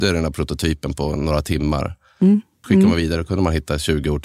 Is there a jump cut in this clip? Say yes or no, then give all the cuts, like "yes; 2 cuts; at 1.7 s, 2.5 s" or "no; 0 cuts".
yes; 1 cut; at 2.6 s